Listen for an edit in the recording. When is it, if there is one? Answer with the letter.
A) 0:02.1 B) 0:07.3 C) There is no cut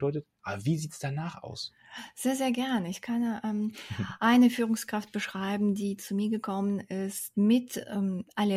B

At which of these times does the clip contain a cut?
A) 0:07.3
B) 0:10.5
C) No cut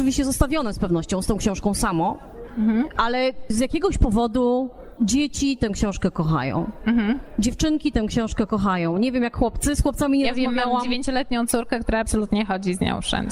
C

